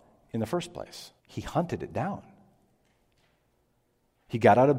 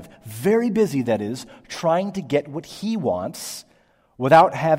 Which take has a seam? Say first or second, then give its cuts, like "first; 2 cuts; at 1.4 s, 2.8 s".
first; 1 cut; at 1.2 s